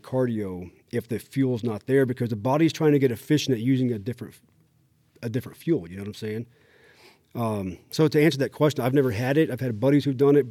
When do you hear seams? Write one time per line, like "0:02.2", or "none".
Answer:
none

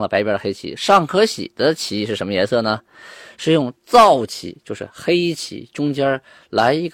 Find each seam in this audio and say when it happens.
none

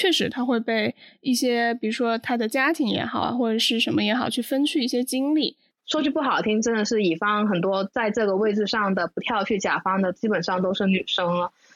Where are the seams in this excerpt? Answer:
0:05.7

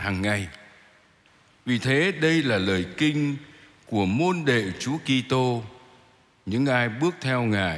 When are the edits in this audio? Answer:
0:01.5

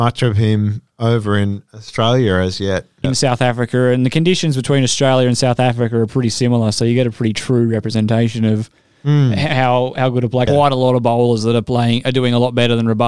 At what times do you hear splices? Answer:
0:03.0
0:10.5

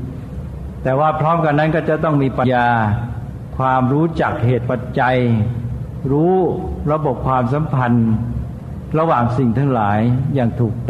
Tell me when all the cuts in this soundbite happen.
0:02.4

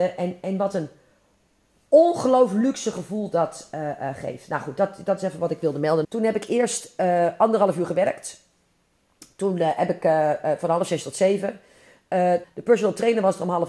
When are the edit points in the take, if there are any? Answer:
0:06.0
0:12.4

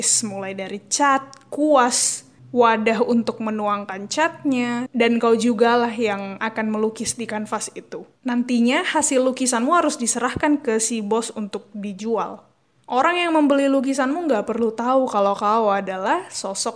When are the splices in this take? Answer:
0:04.9
0:08.2

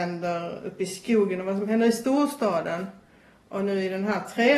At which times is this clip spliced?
none

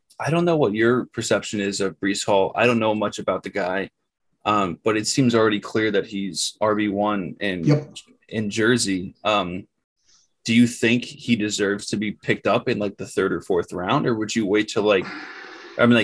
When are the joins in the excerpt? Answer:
none

